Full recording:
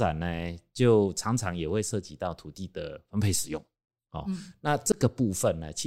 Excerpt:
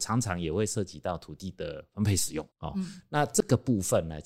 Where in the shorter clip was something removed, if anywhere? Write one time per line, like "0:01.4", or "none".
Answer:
0:02.5